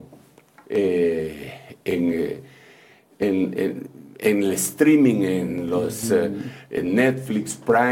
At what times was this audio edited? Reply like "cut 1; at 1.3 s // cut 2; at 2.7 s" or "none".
none